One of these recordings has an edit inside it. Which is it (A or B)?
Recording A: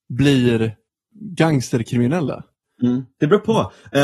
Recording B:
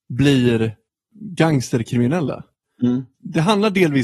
B